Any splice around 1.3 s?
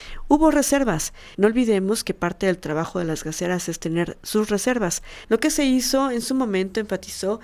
yes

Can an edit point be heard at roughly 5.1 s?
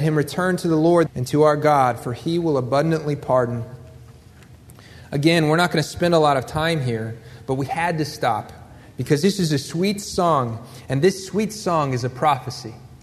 no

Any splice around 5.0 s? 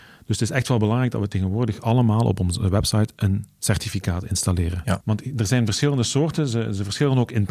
no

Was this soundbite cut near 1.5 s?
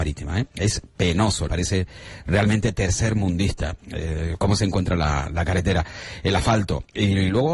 yes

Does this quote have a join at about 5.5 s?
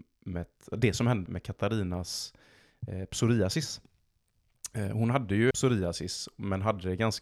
yes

